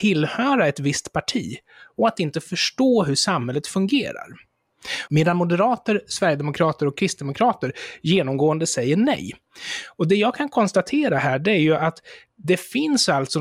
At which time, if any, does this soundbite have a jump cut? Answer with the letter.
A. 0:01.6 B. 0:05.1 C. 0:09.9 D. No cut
B